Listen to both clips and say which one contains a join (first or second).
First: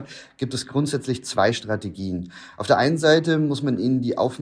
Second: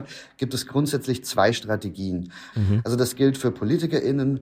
second